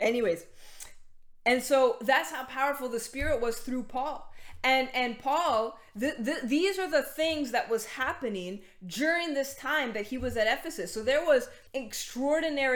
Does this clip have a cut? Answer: yes; 1 cut; at 11.7 s

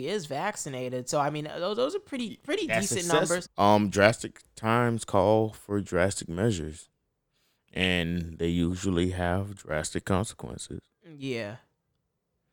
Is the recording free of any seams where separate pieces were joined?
no; 1 cut; at 3.5 s

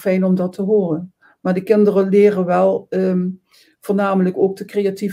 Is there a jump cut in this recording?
no; 0 cuts

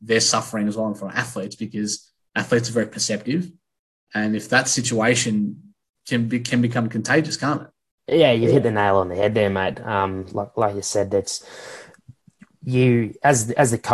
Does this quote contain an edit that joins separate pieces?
no; 0 cuts

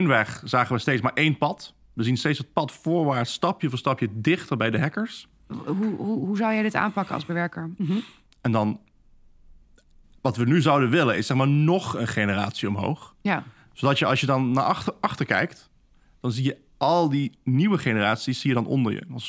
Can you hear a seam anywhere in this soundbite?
yes; 2 cuts; at 5.5 s, 7.8 s

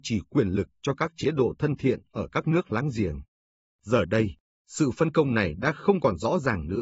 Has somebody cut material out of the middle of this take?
no; 0 cuts

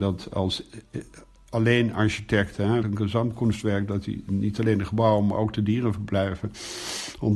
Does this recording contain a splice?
yes; 1 cut; at 2.8 s

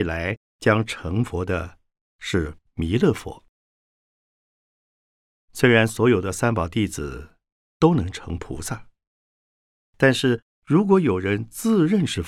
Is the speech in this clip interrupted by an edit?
no; 0 cuts

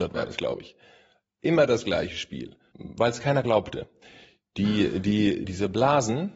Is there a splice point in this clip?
yes; 2 cuts; at 2.7 s, 5.4 s

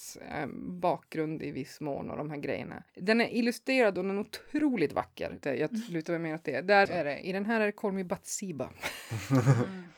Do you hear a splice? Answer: yes; 3 cuts; at 2.9 s, 5.4 s, 6.9 s

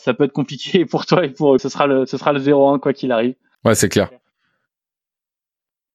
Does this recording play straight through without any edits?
no; 2 cuts; at 1.6 s, 3.5 s

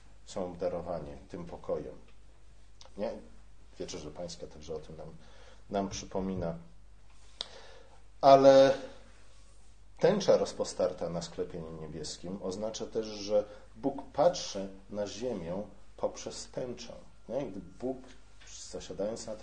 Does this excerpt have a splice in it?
yes; 1 cut; at 2.9 s

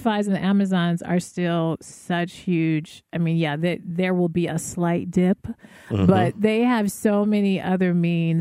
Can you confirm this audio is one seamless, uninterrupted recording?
yes; 0 cuts

